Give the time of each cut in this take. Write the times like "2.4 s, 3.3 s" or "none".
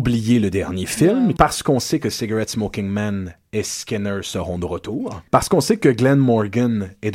1.4 s, 5.3 s